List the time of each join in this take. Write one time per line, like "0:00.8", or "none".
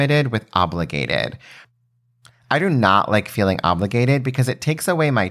none